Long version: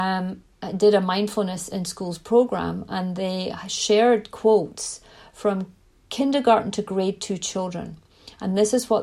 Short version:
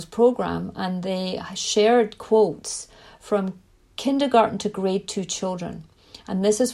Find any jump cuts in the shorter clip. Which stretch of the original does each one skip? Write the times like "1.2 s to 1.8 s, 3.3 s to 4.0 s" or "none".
none